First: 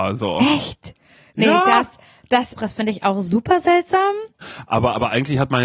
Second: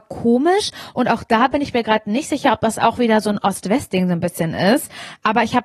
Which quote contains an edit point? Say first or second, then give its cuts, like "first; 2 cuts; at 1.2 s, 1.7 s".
first; 2 cuts; at 2.6 s, 4.4 s